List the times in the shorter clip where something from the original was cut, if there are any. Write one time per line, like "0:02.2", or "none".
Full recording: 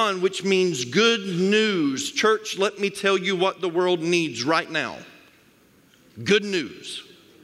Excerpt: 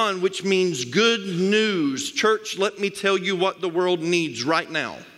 none